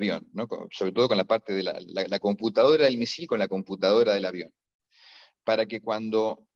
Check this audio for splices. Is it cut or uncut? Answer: uncut